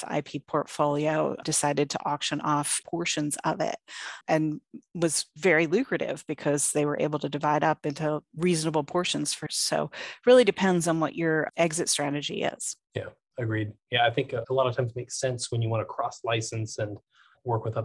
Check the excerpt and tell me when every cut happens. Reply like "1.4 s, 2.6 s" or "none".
9.5 s, 12.8 s, 14.4 s